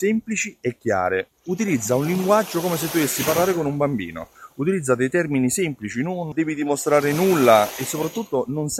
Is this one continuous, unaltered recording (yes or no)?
no